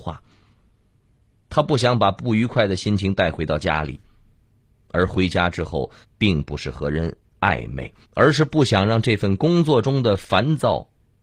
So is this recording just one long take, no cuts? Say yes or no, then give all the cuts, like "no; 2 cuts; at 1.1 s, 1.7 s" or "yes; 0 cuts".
no; 2 cuts; at 6.0 s, 8.0 s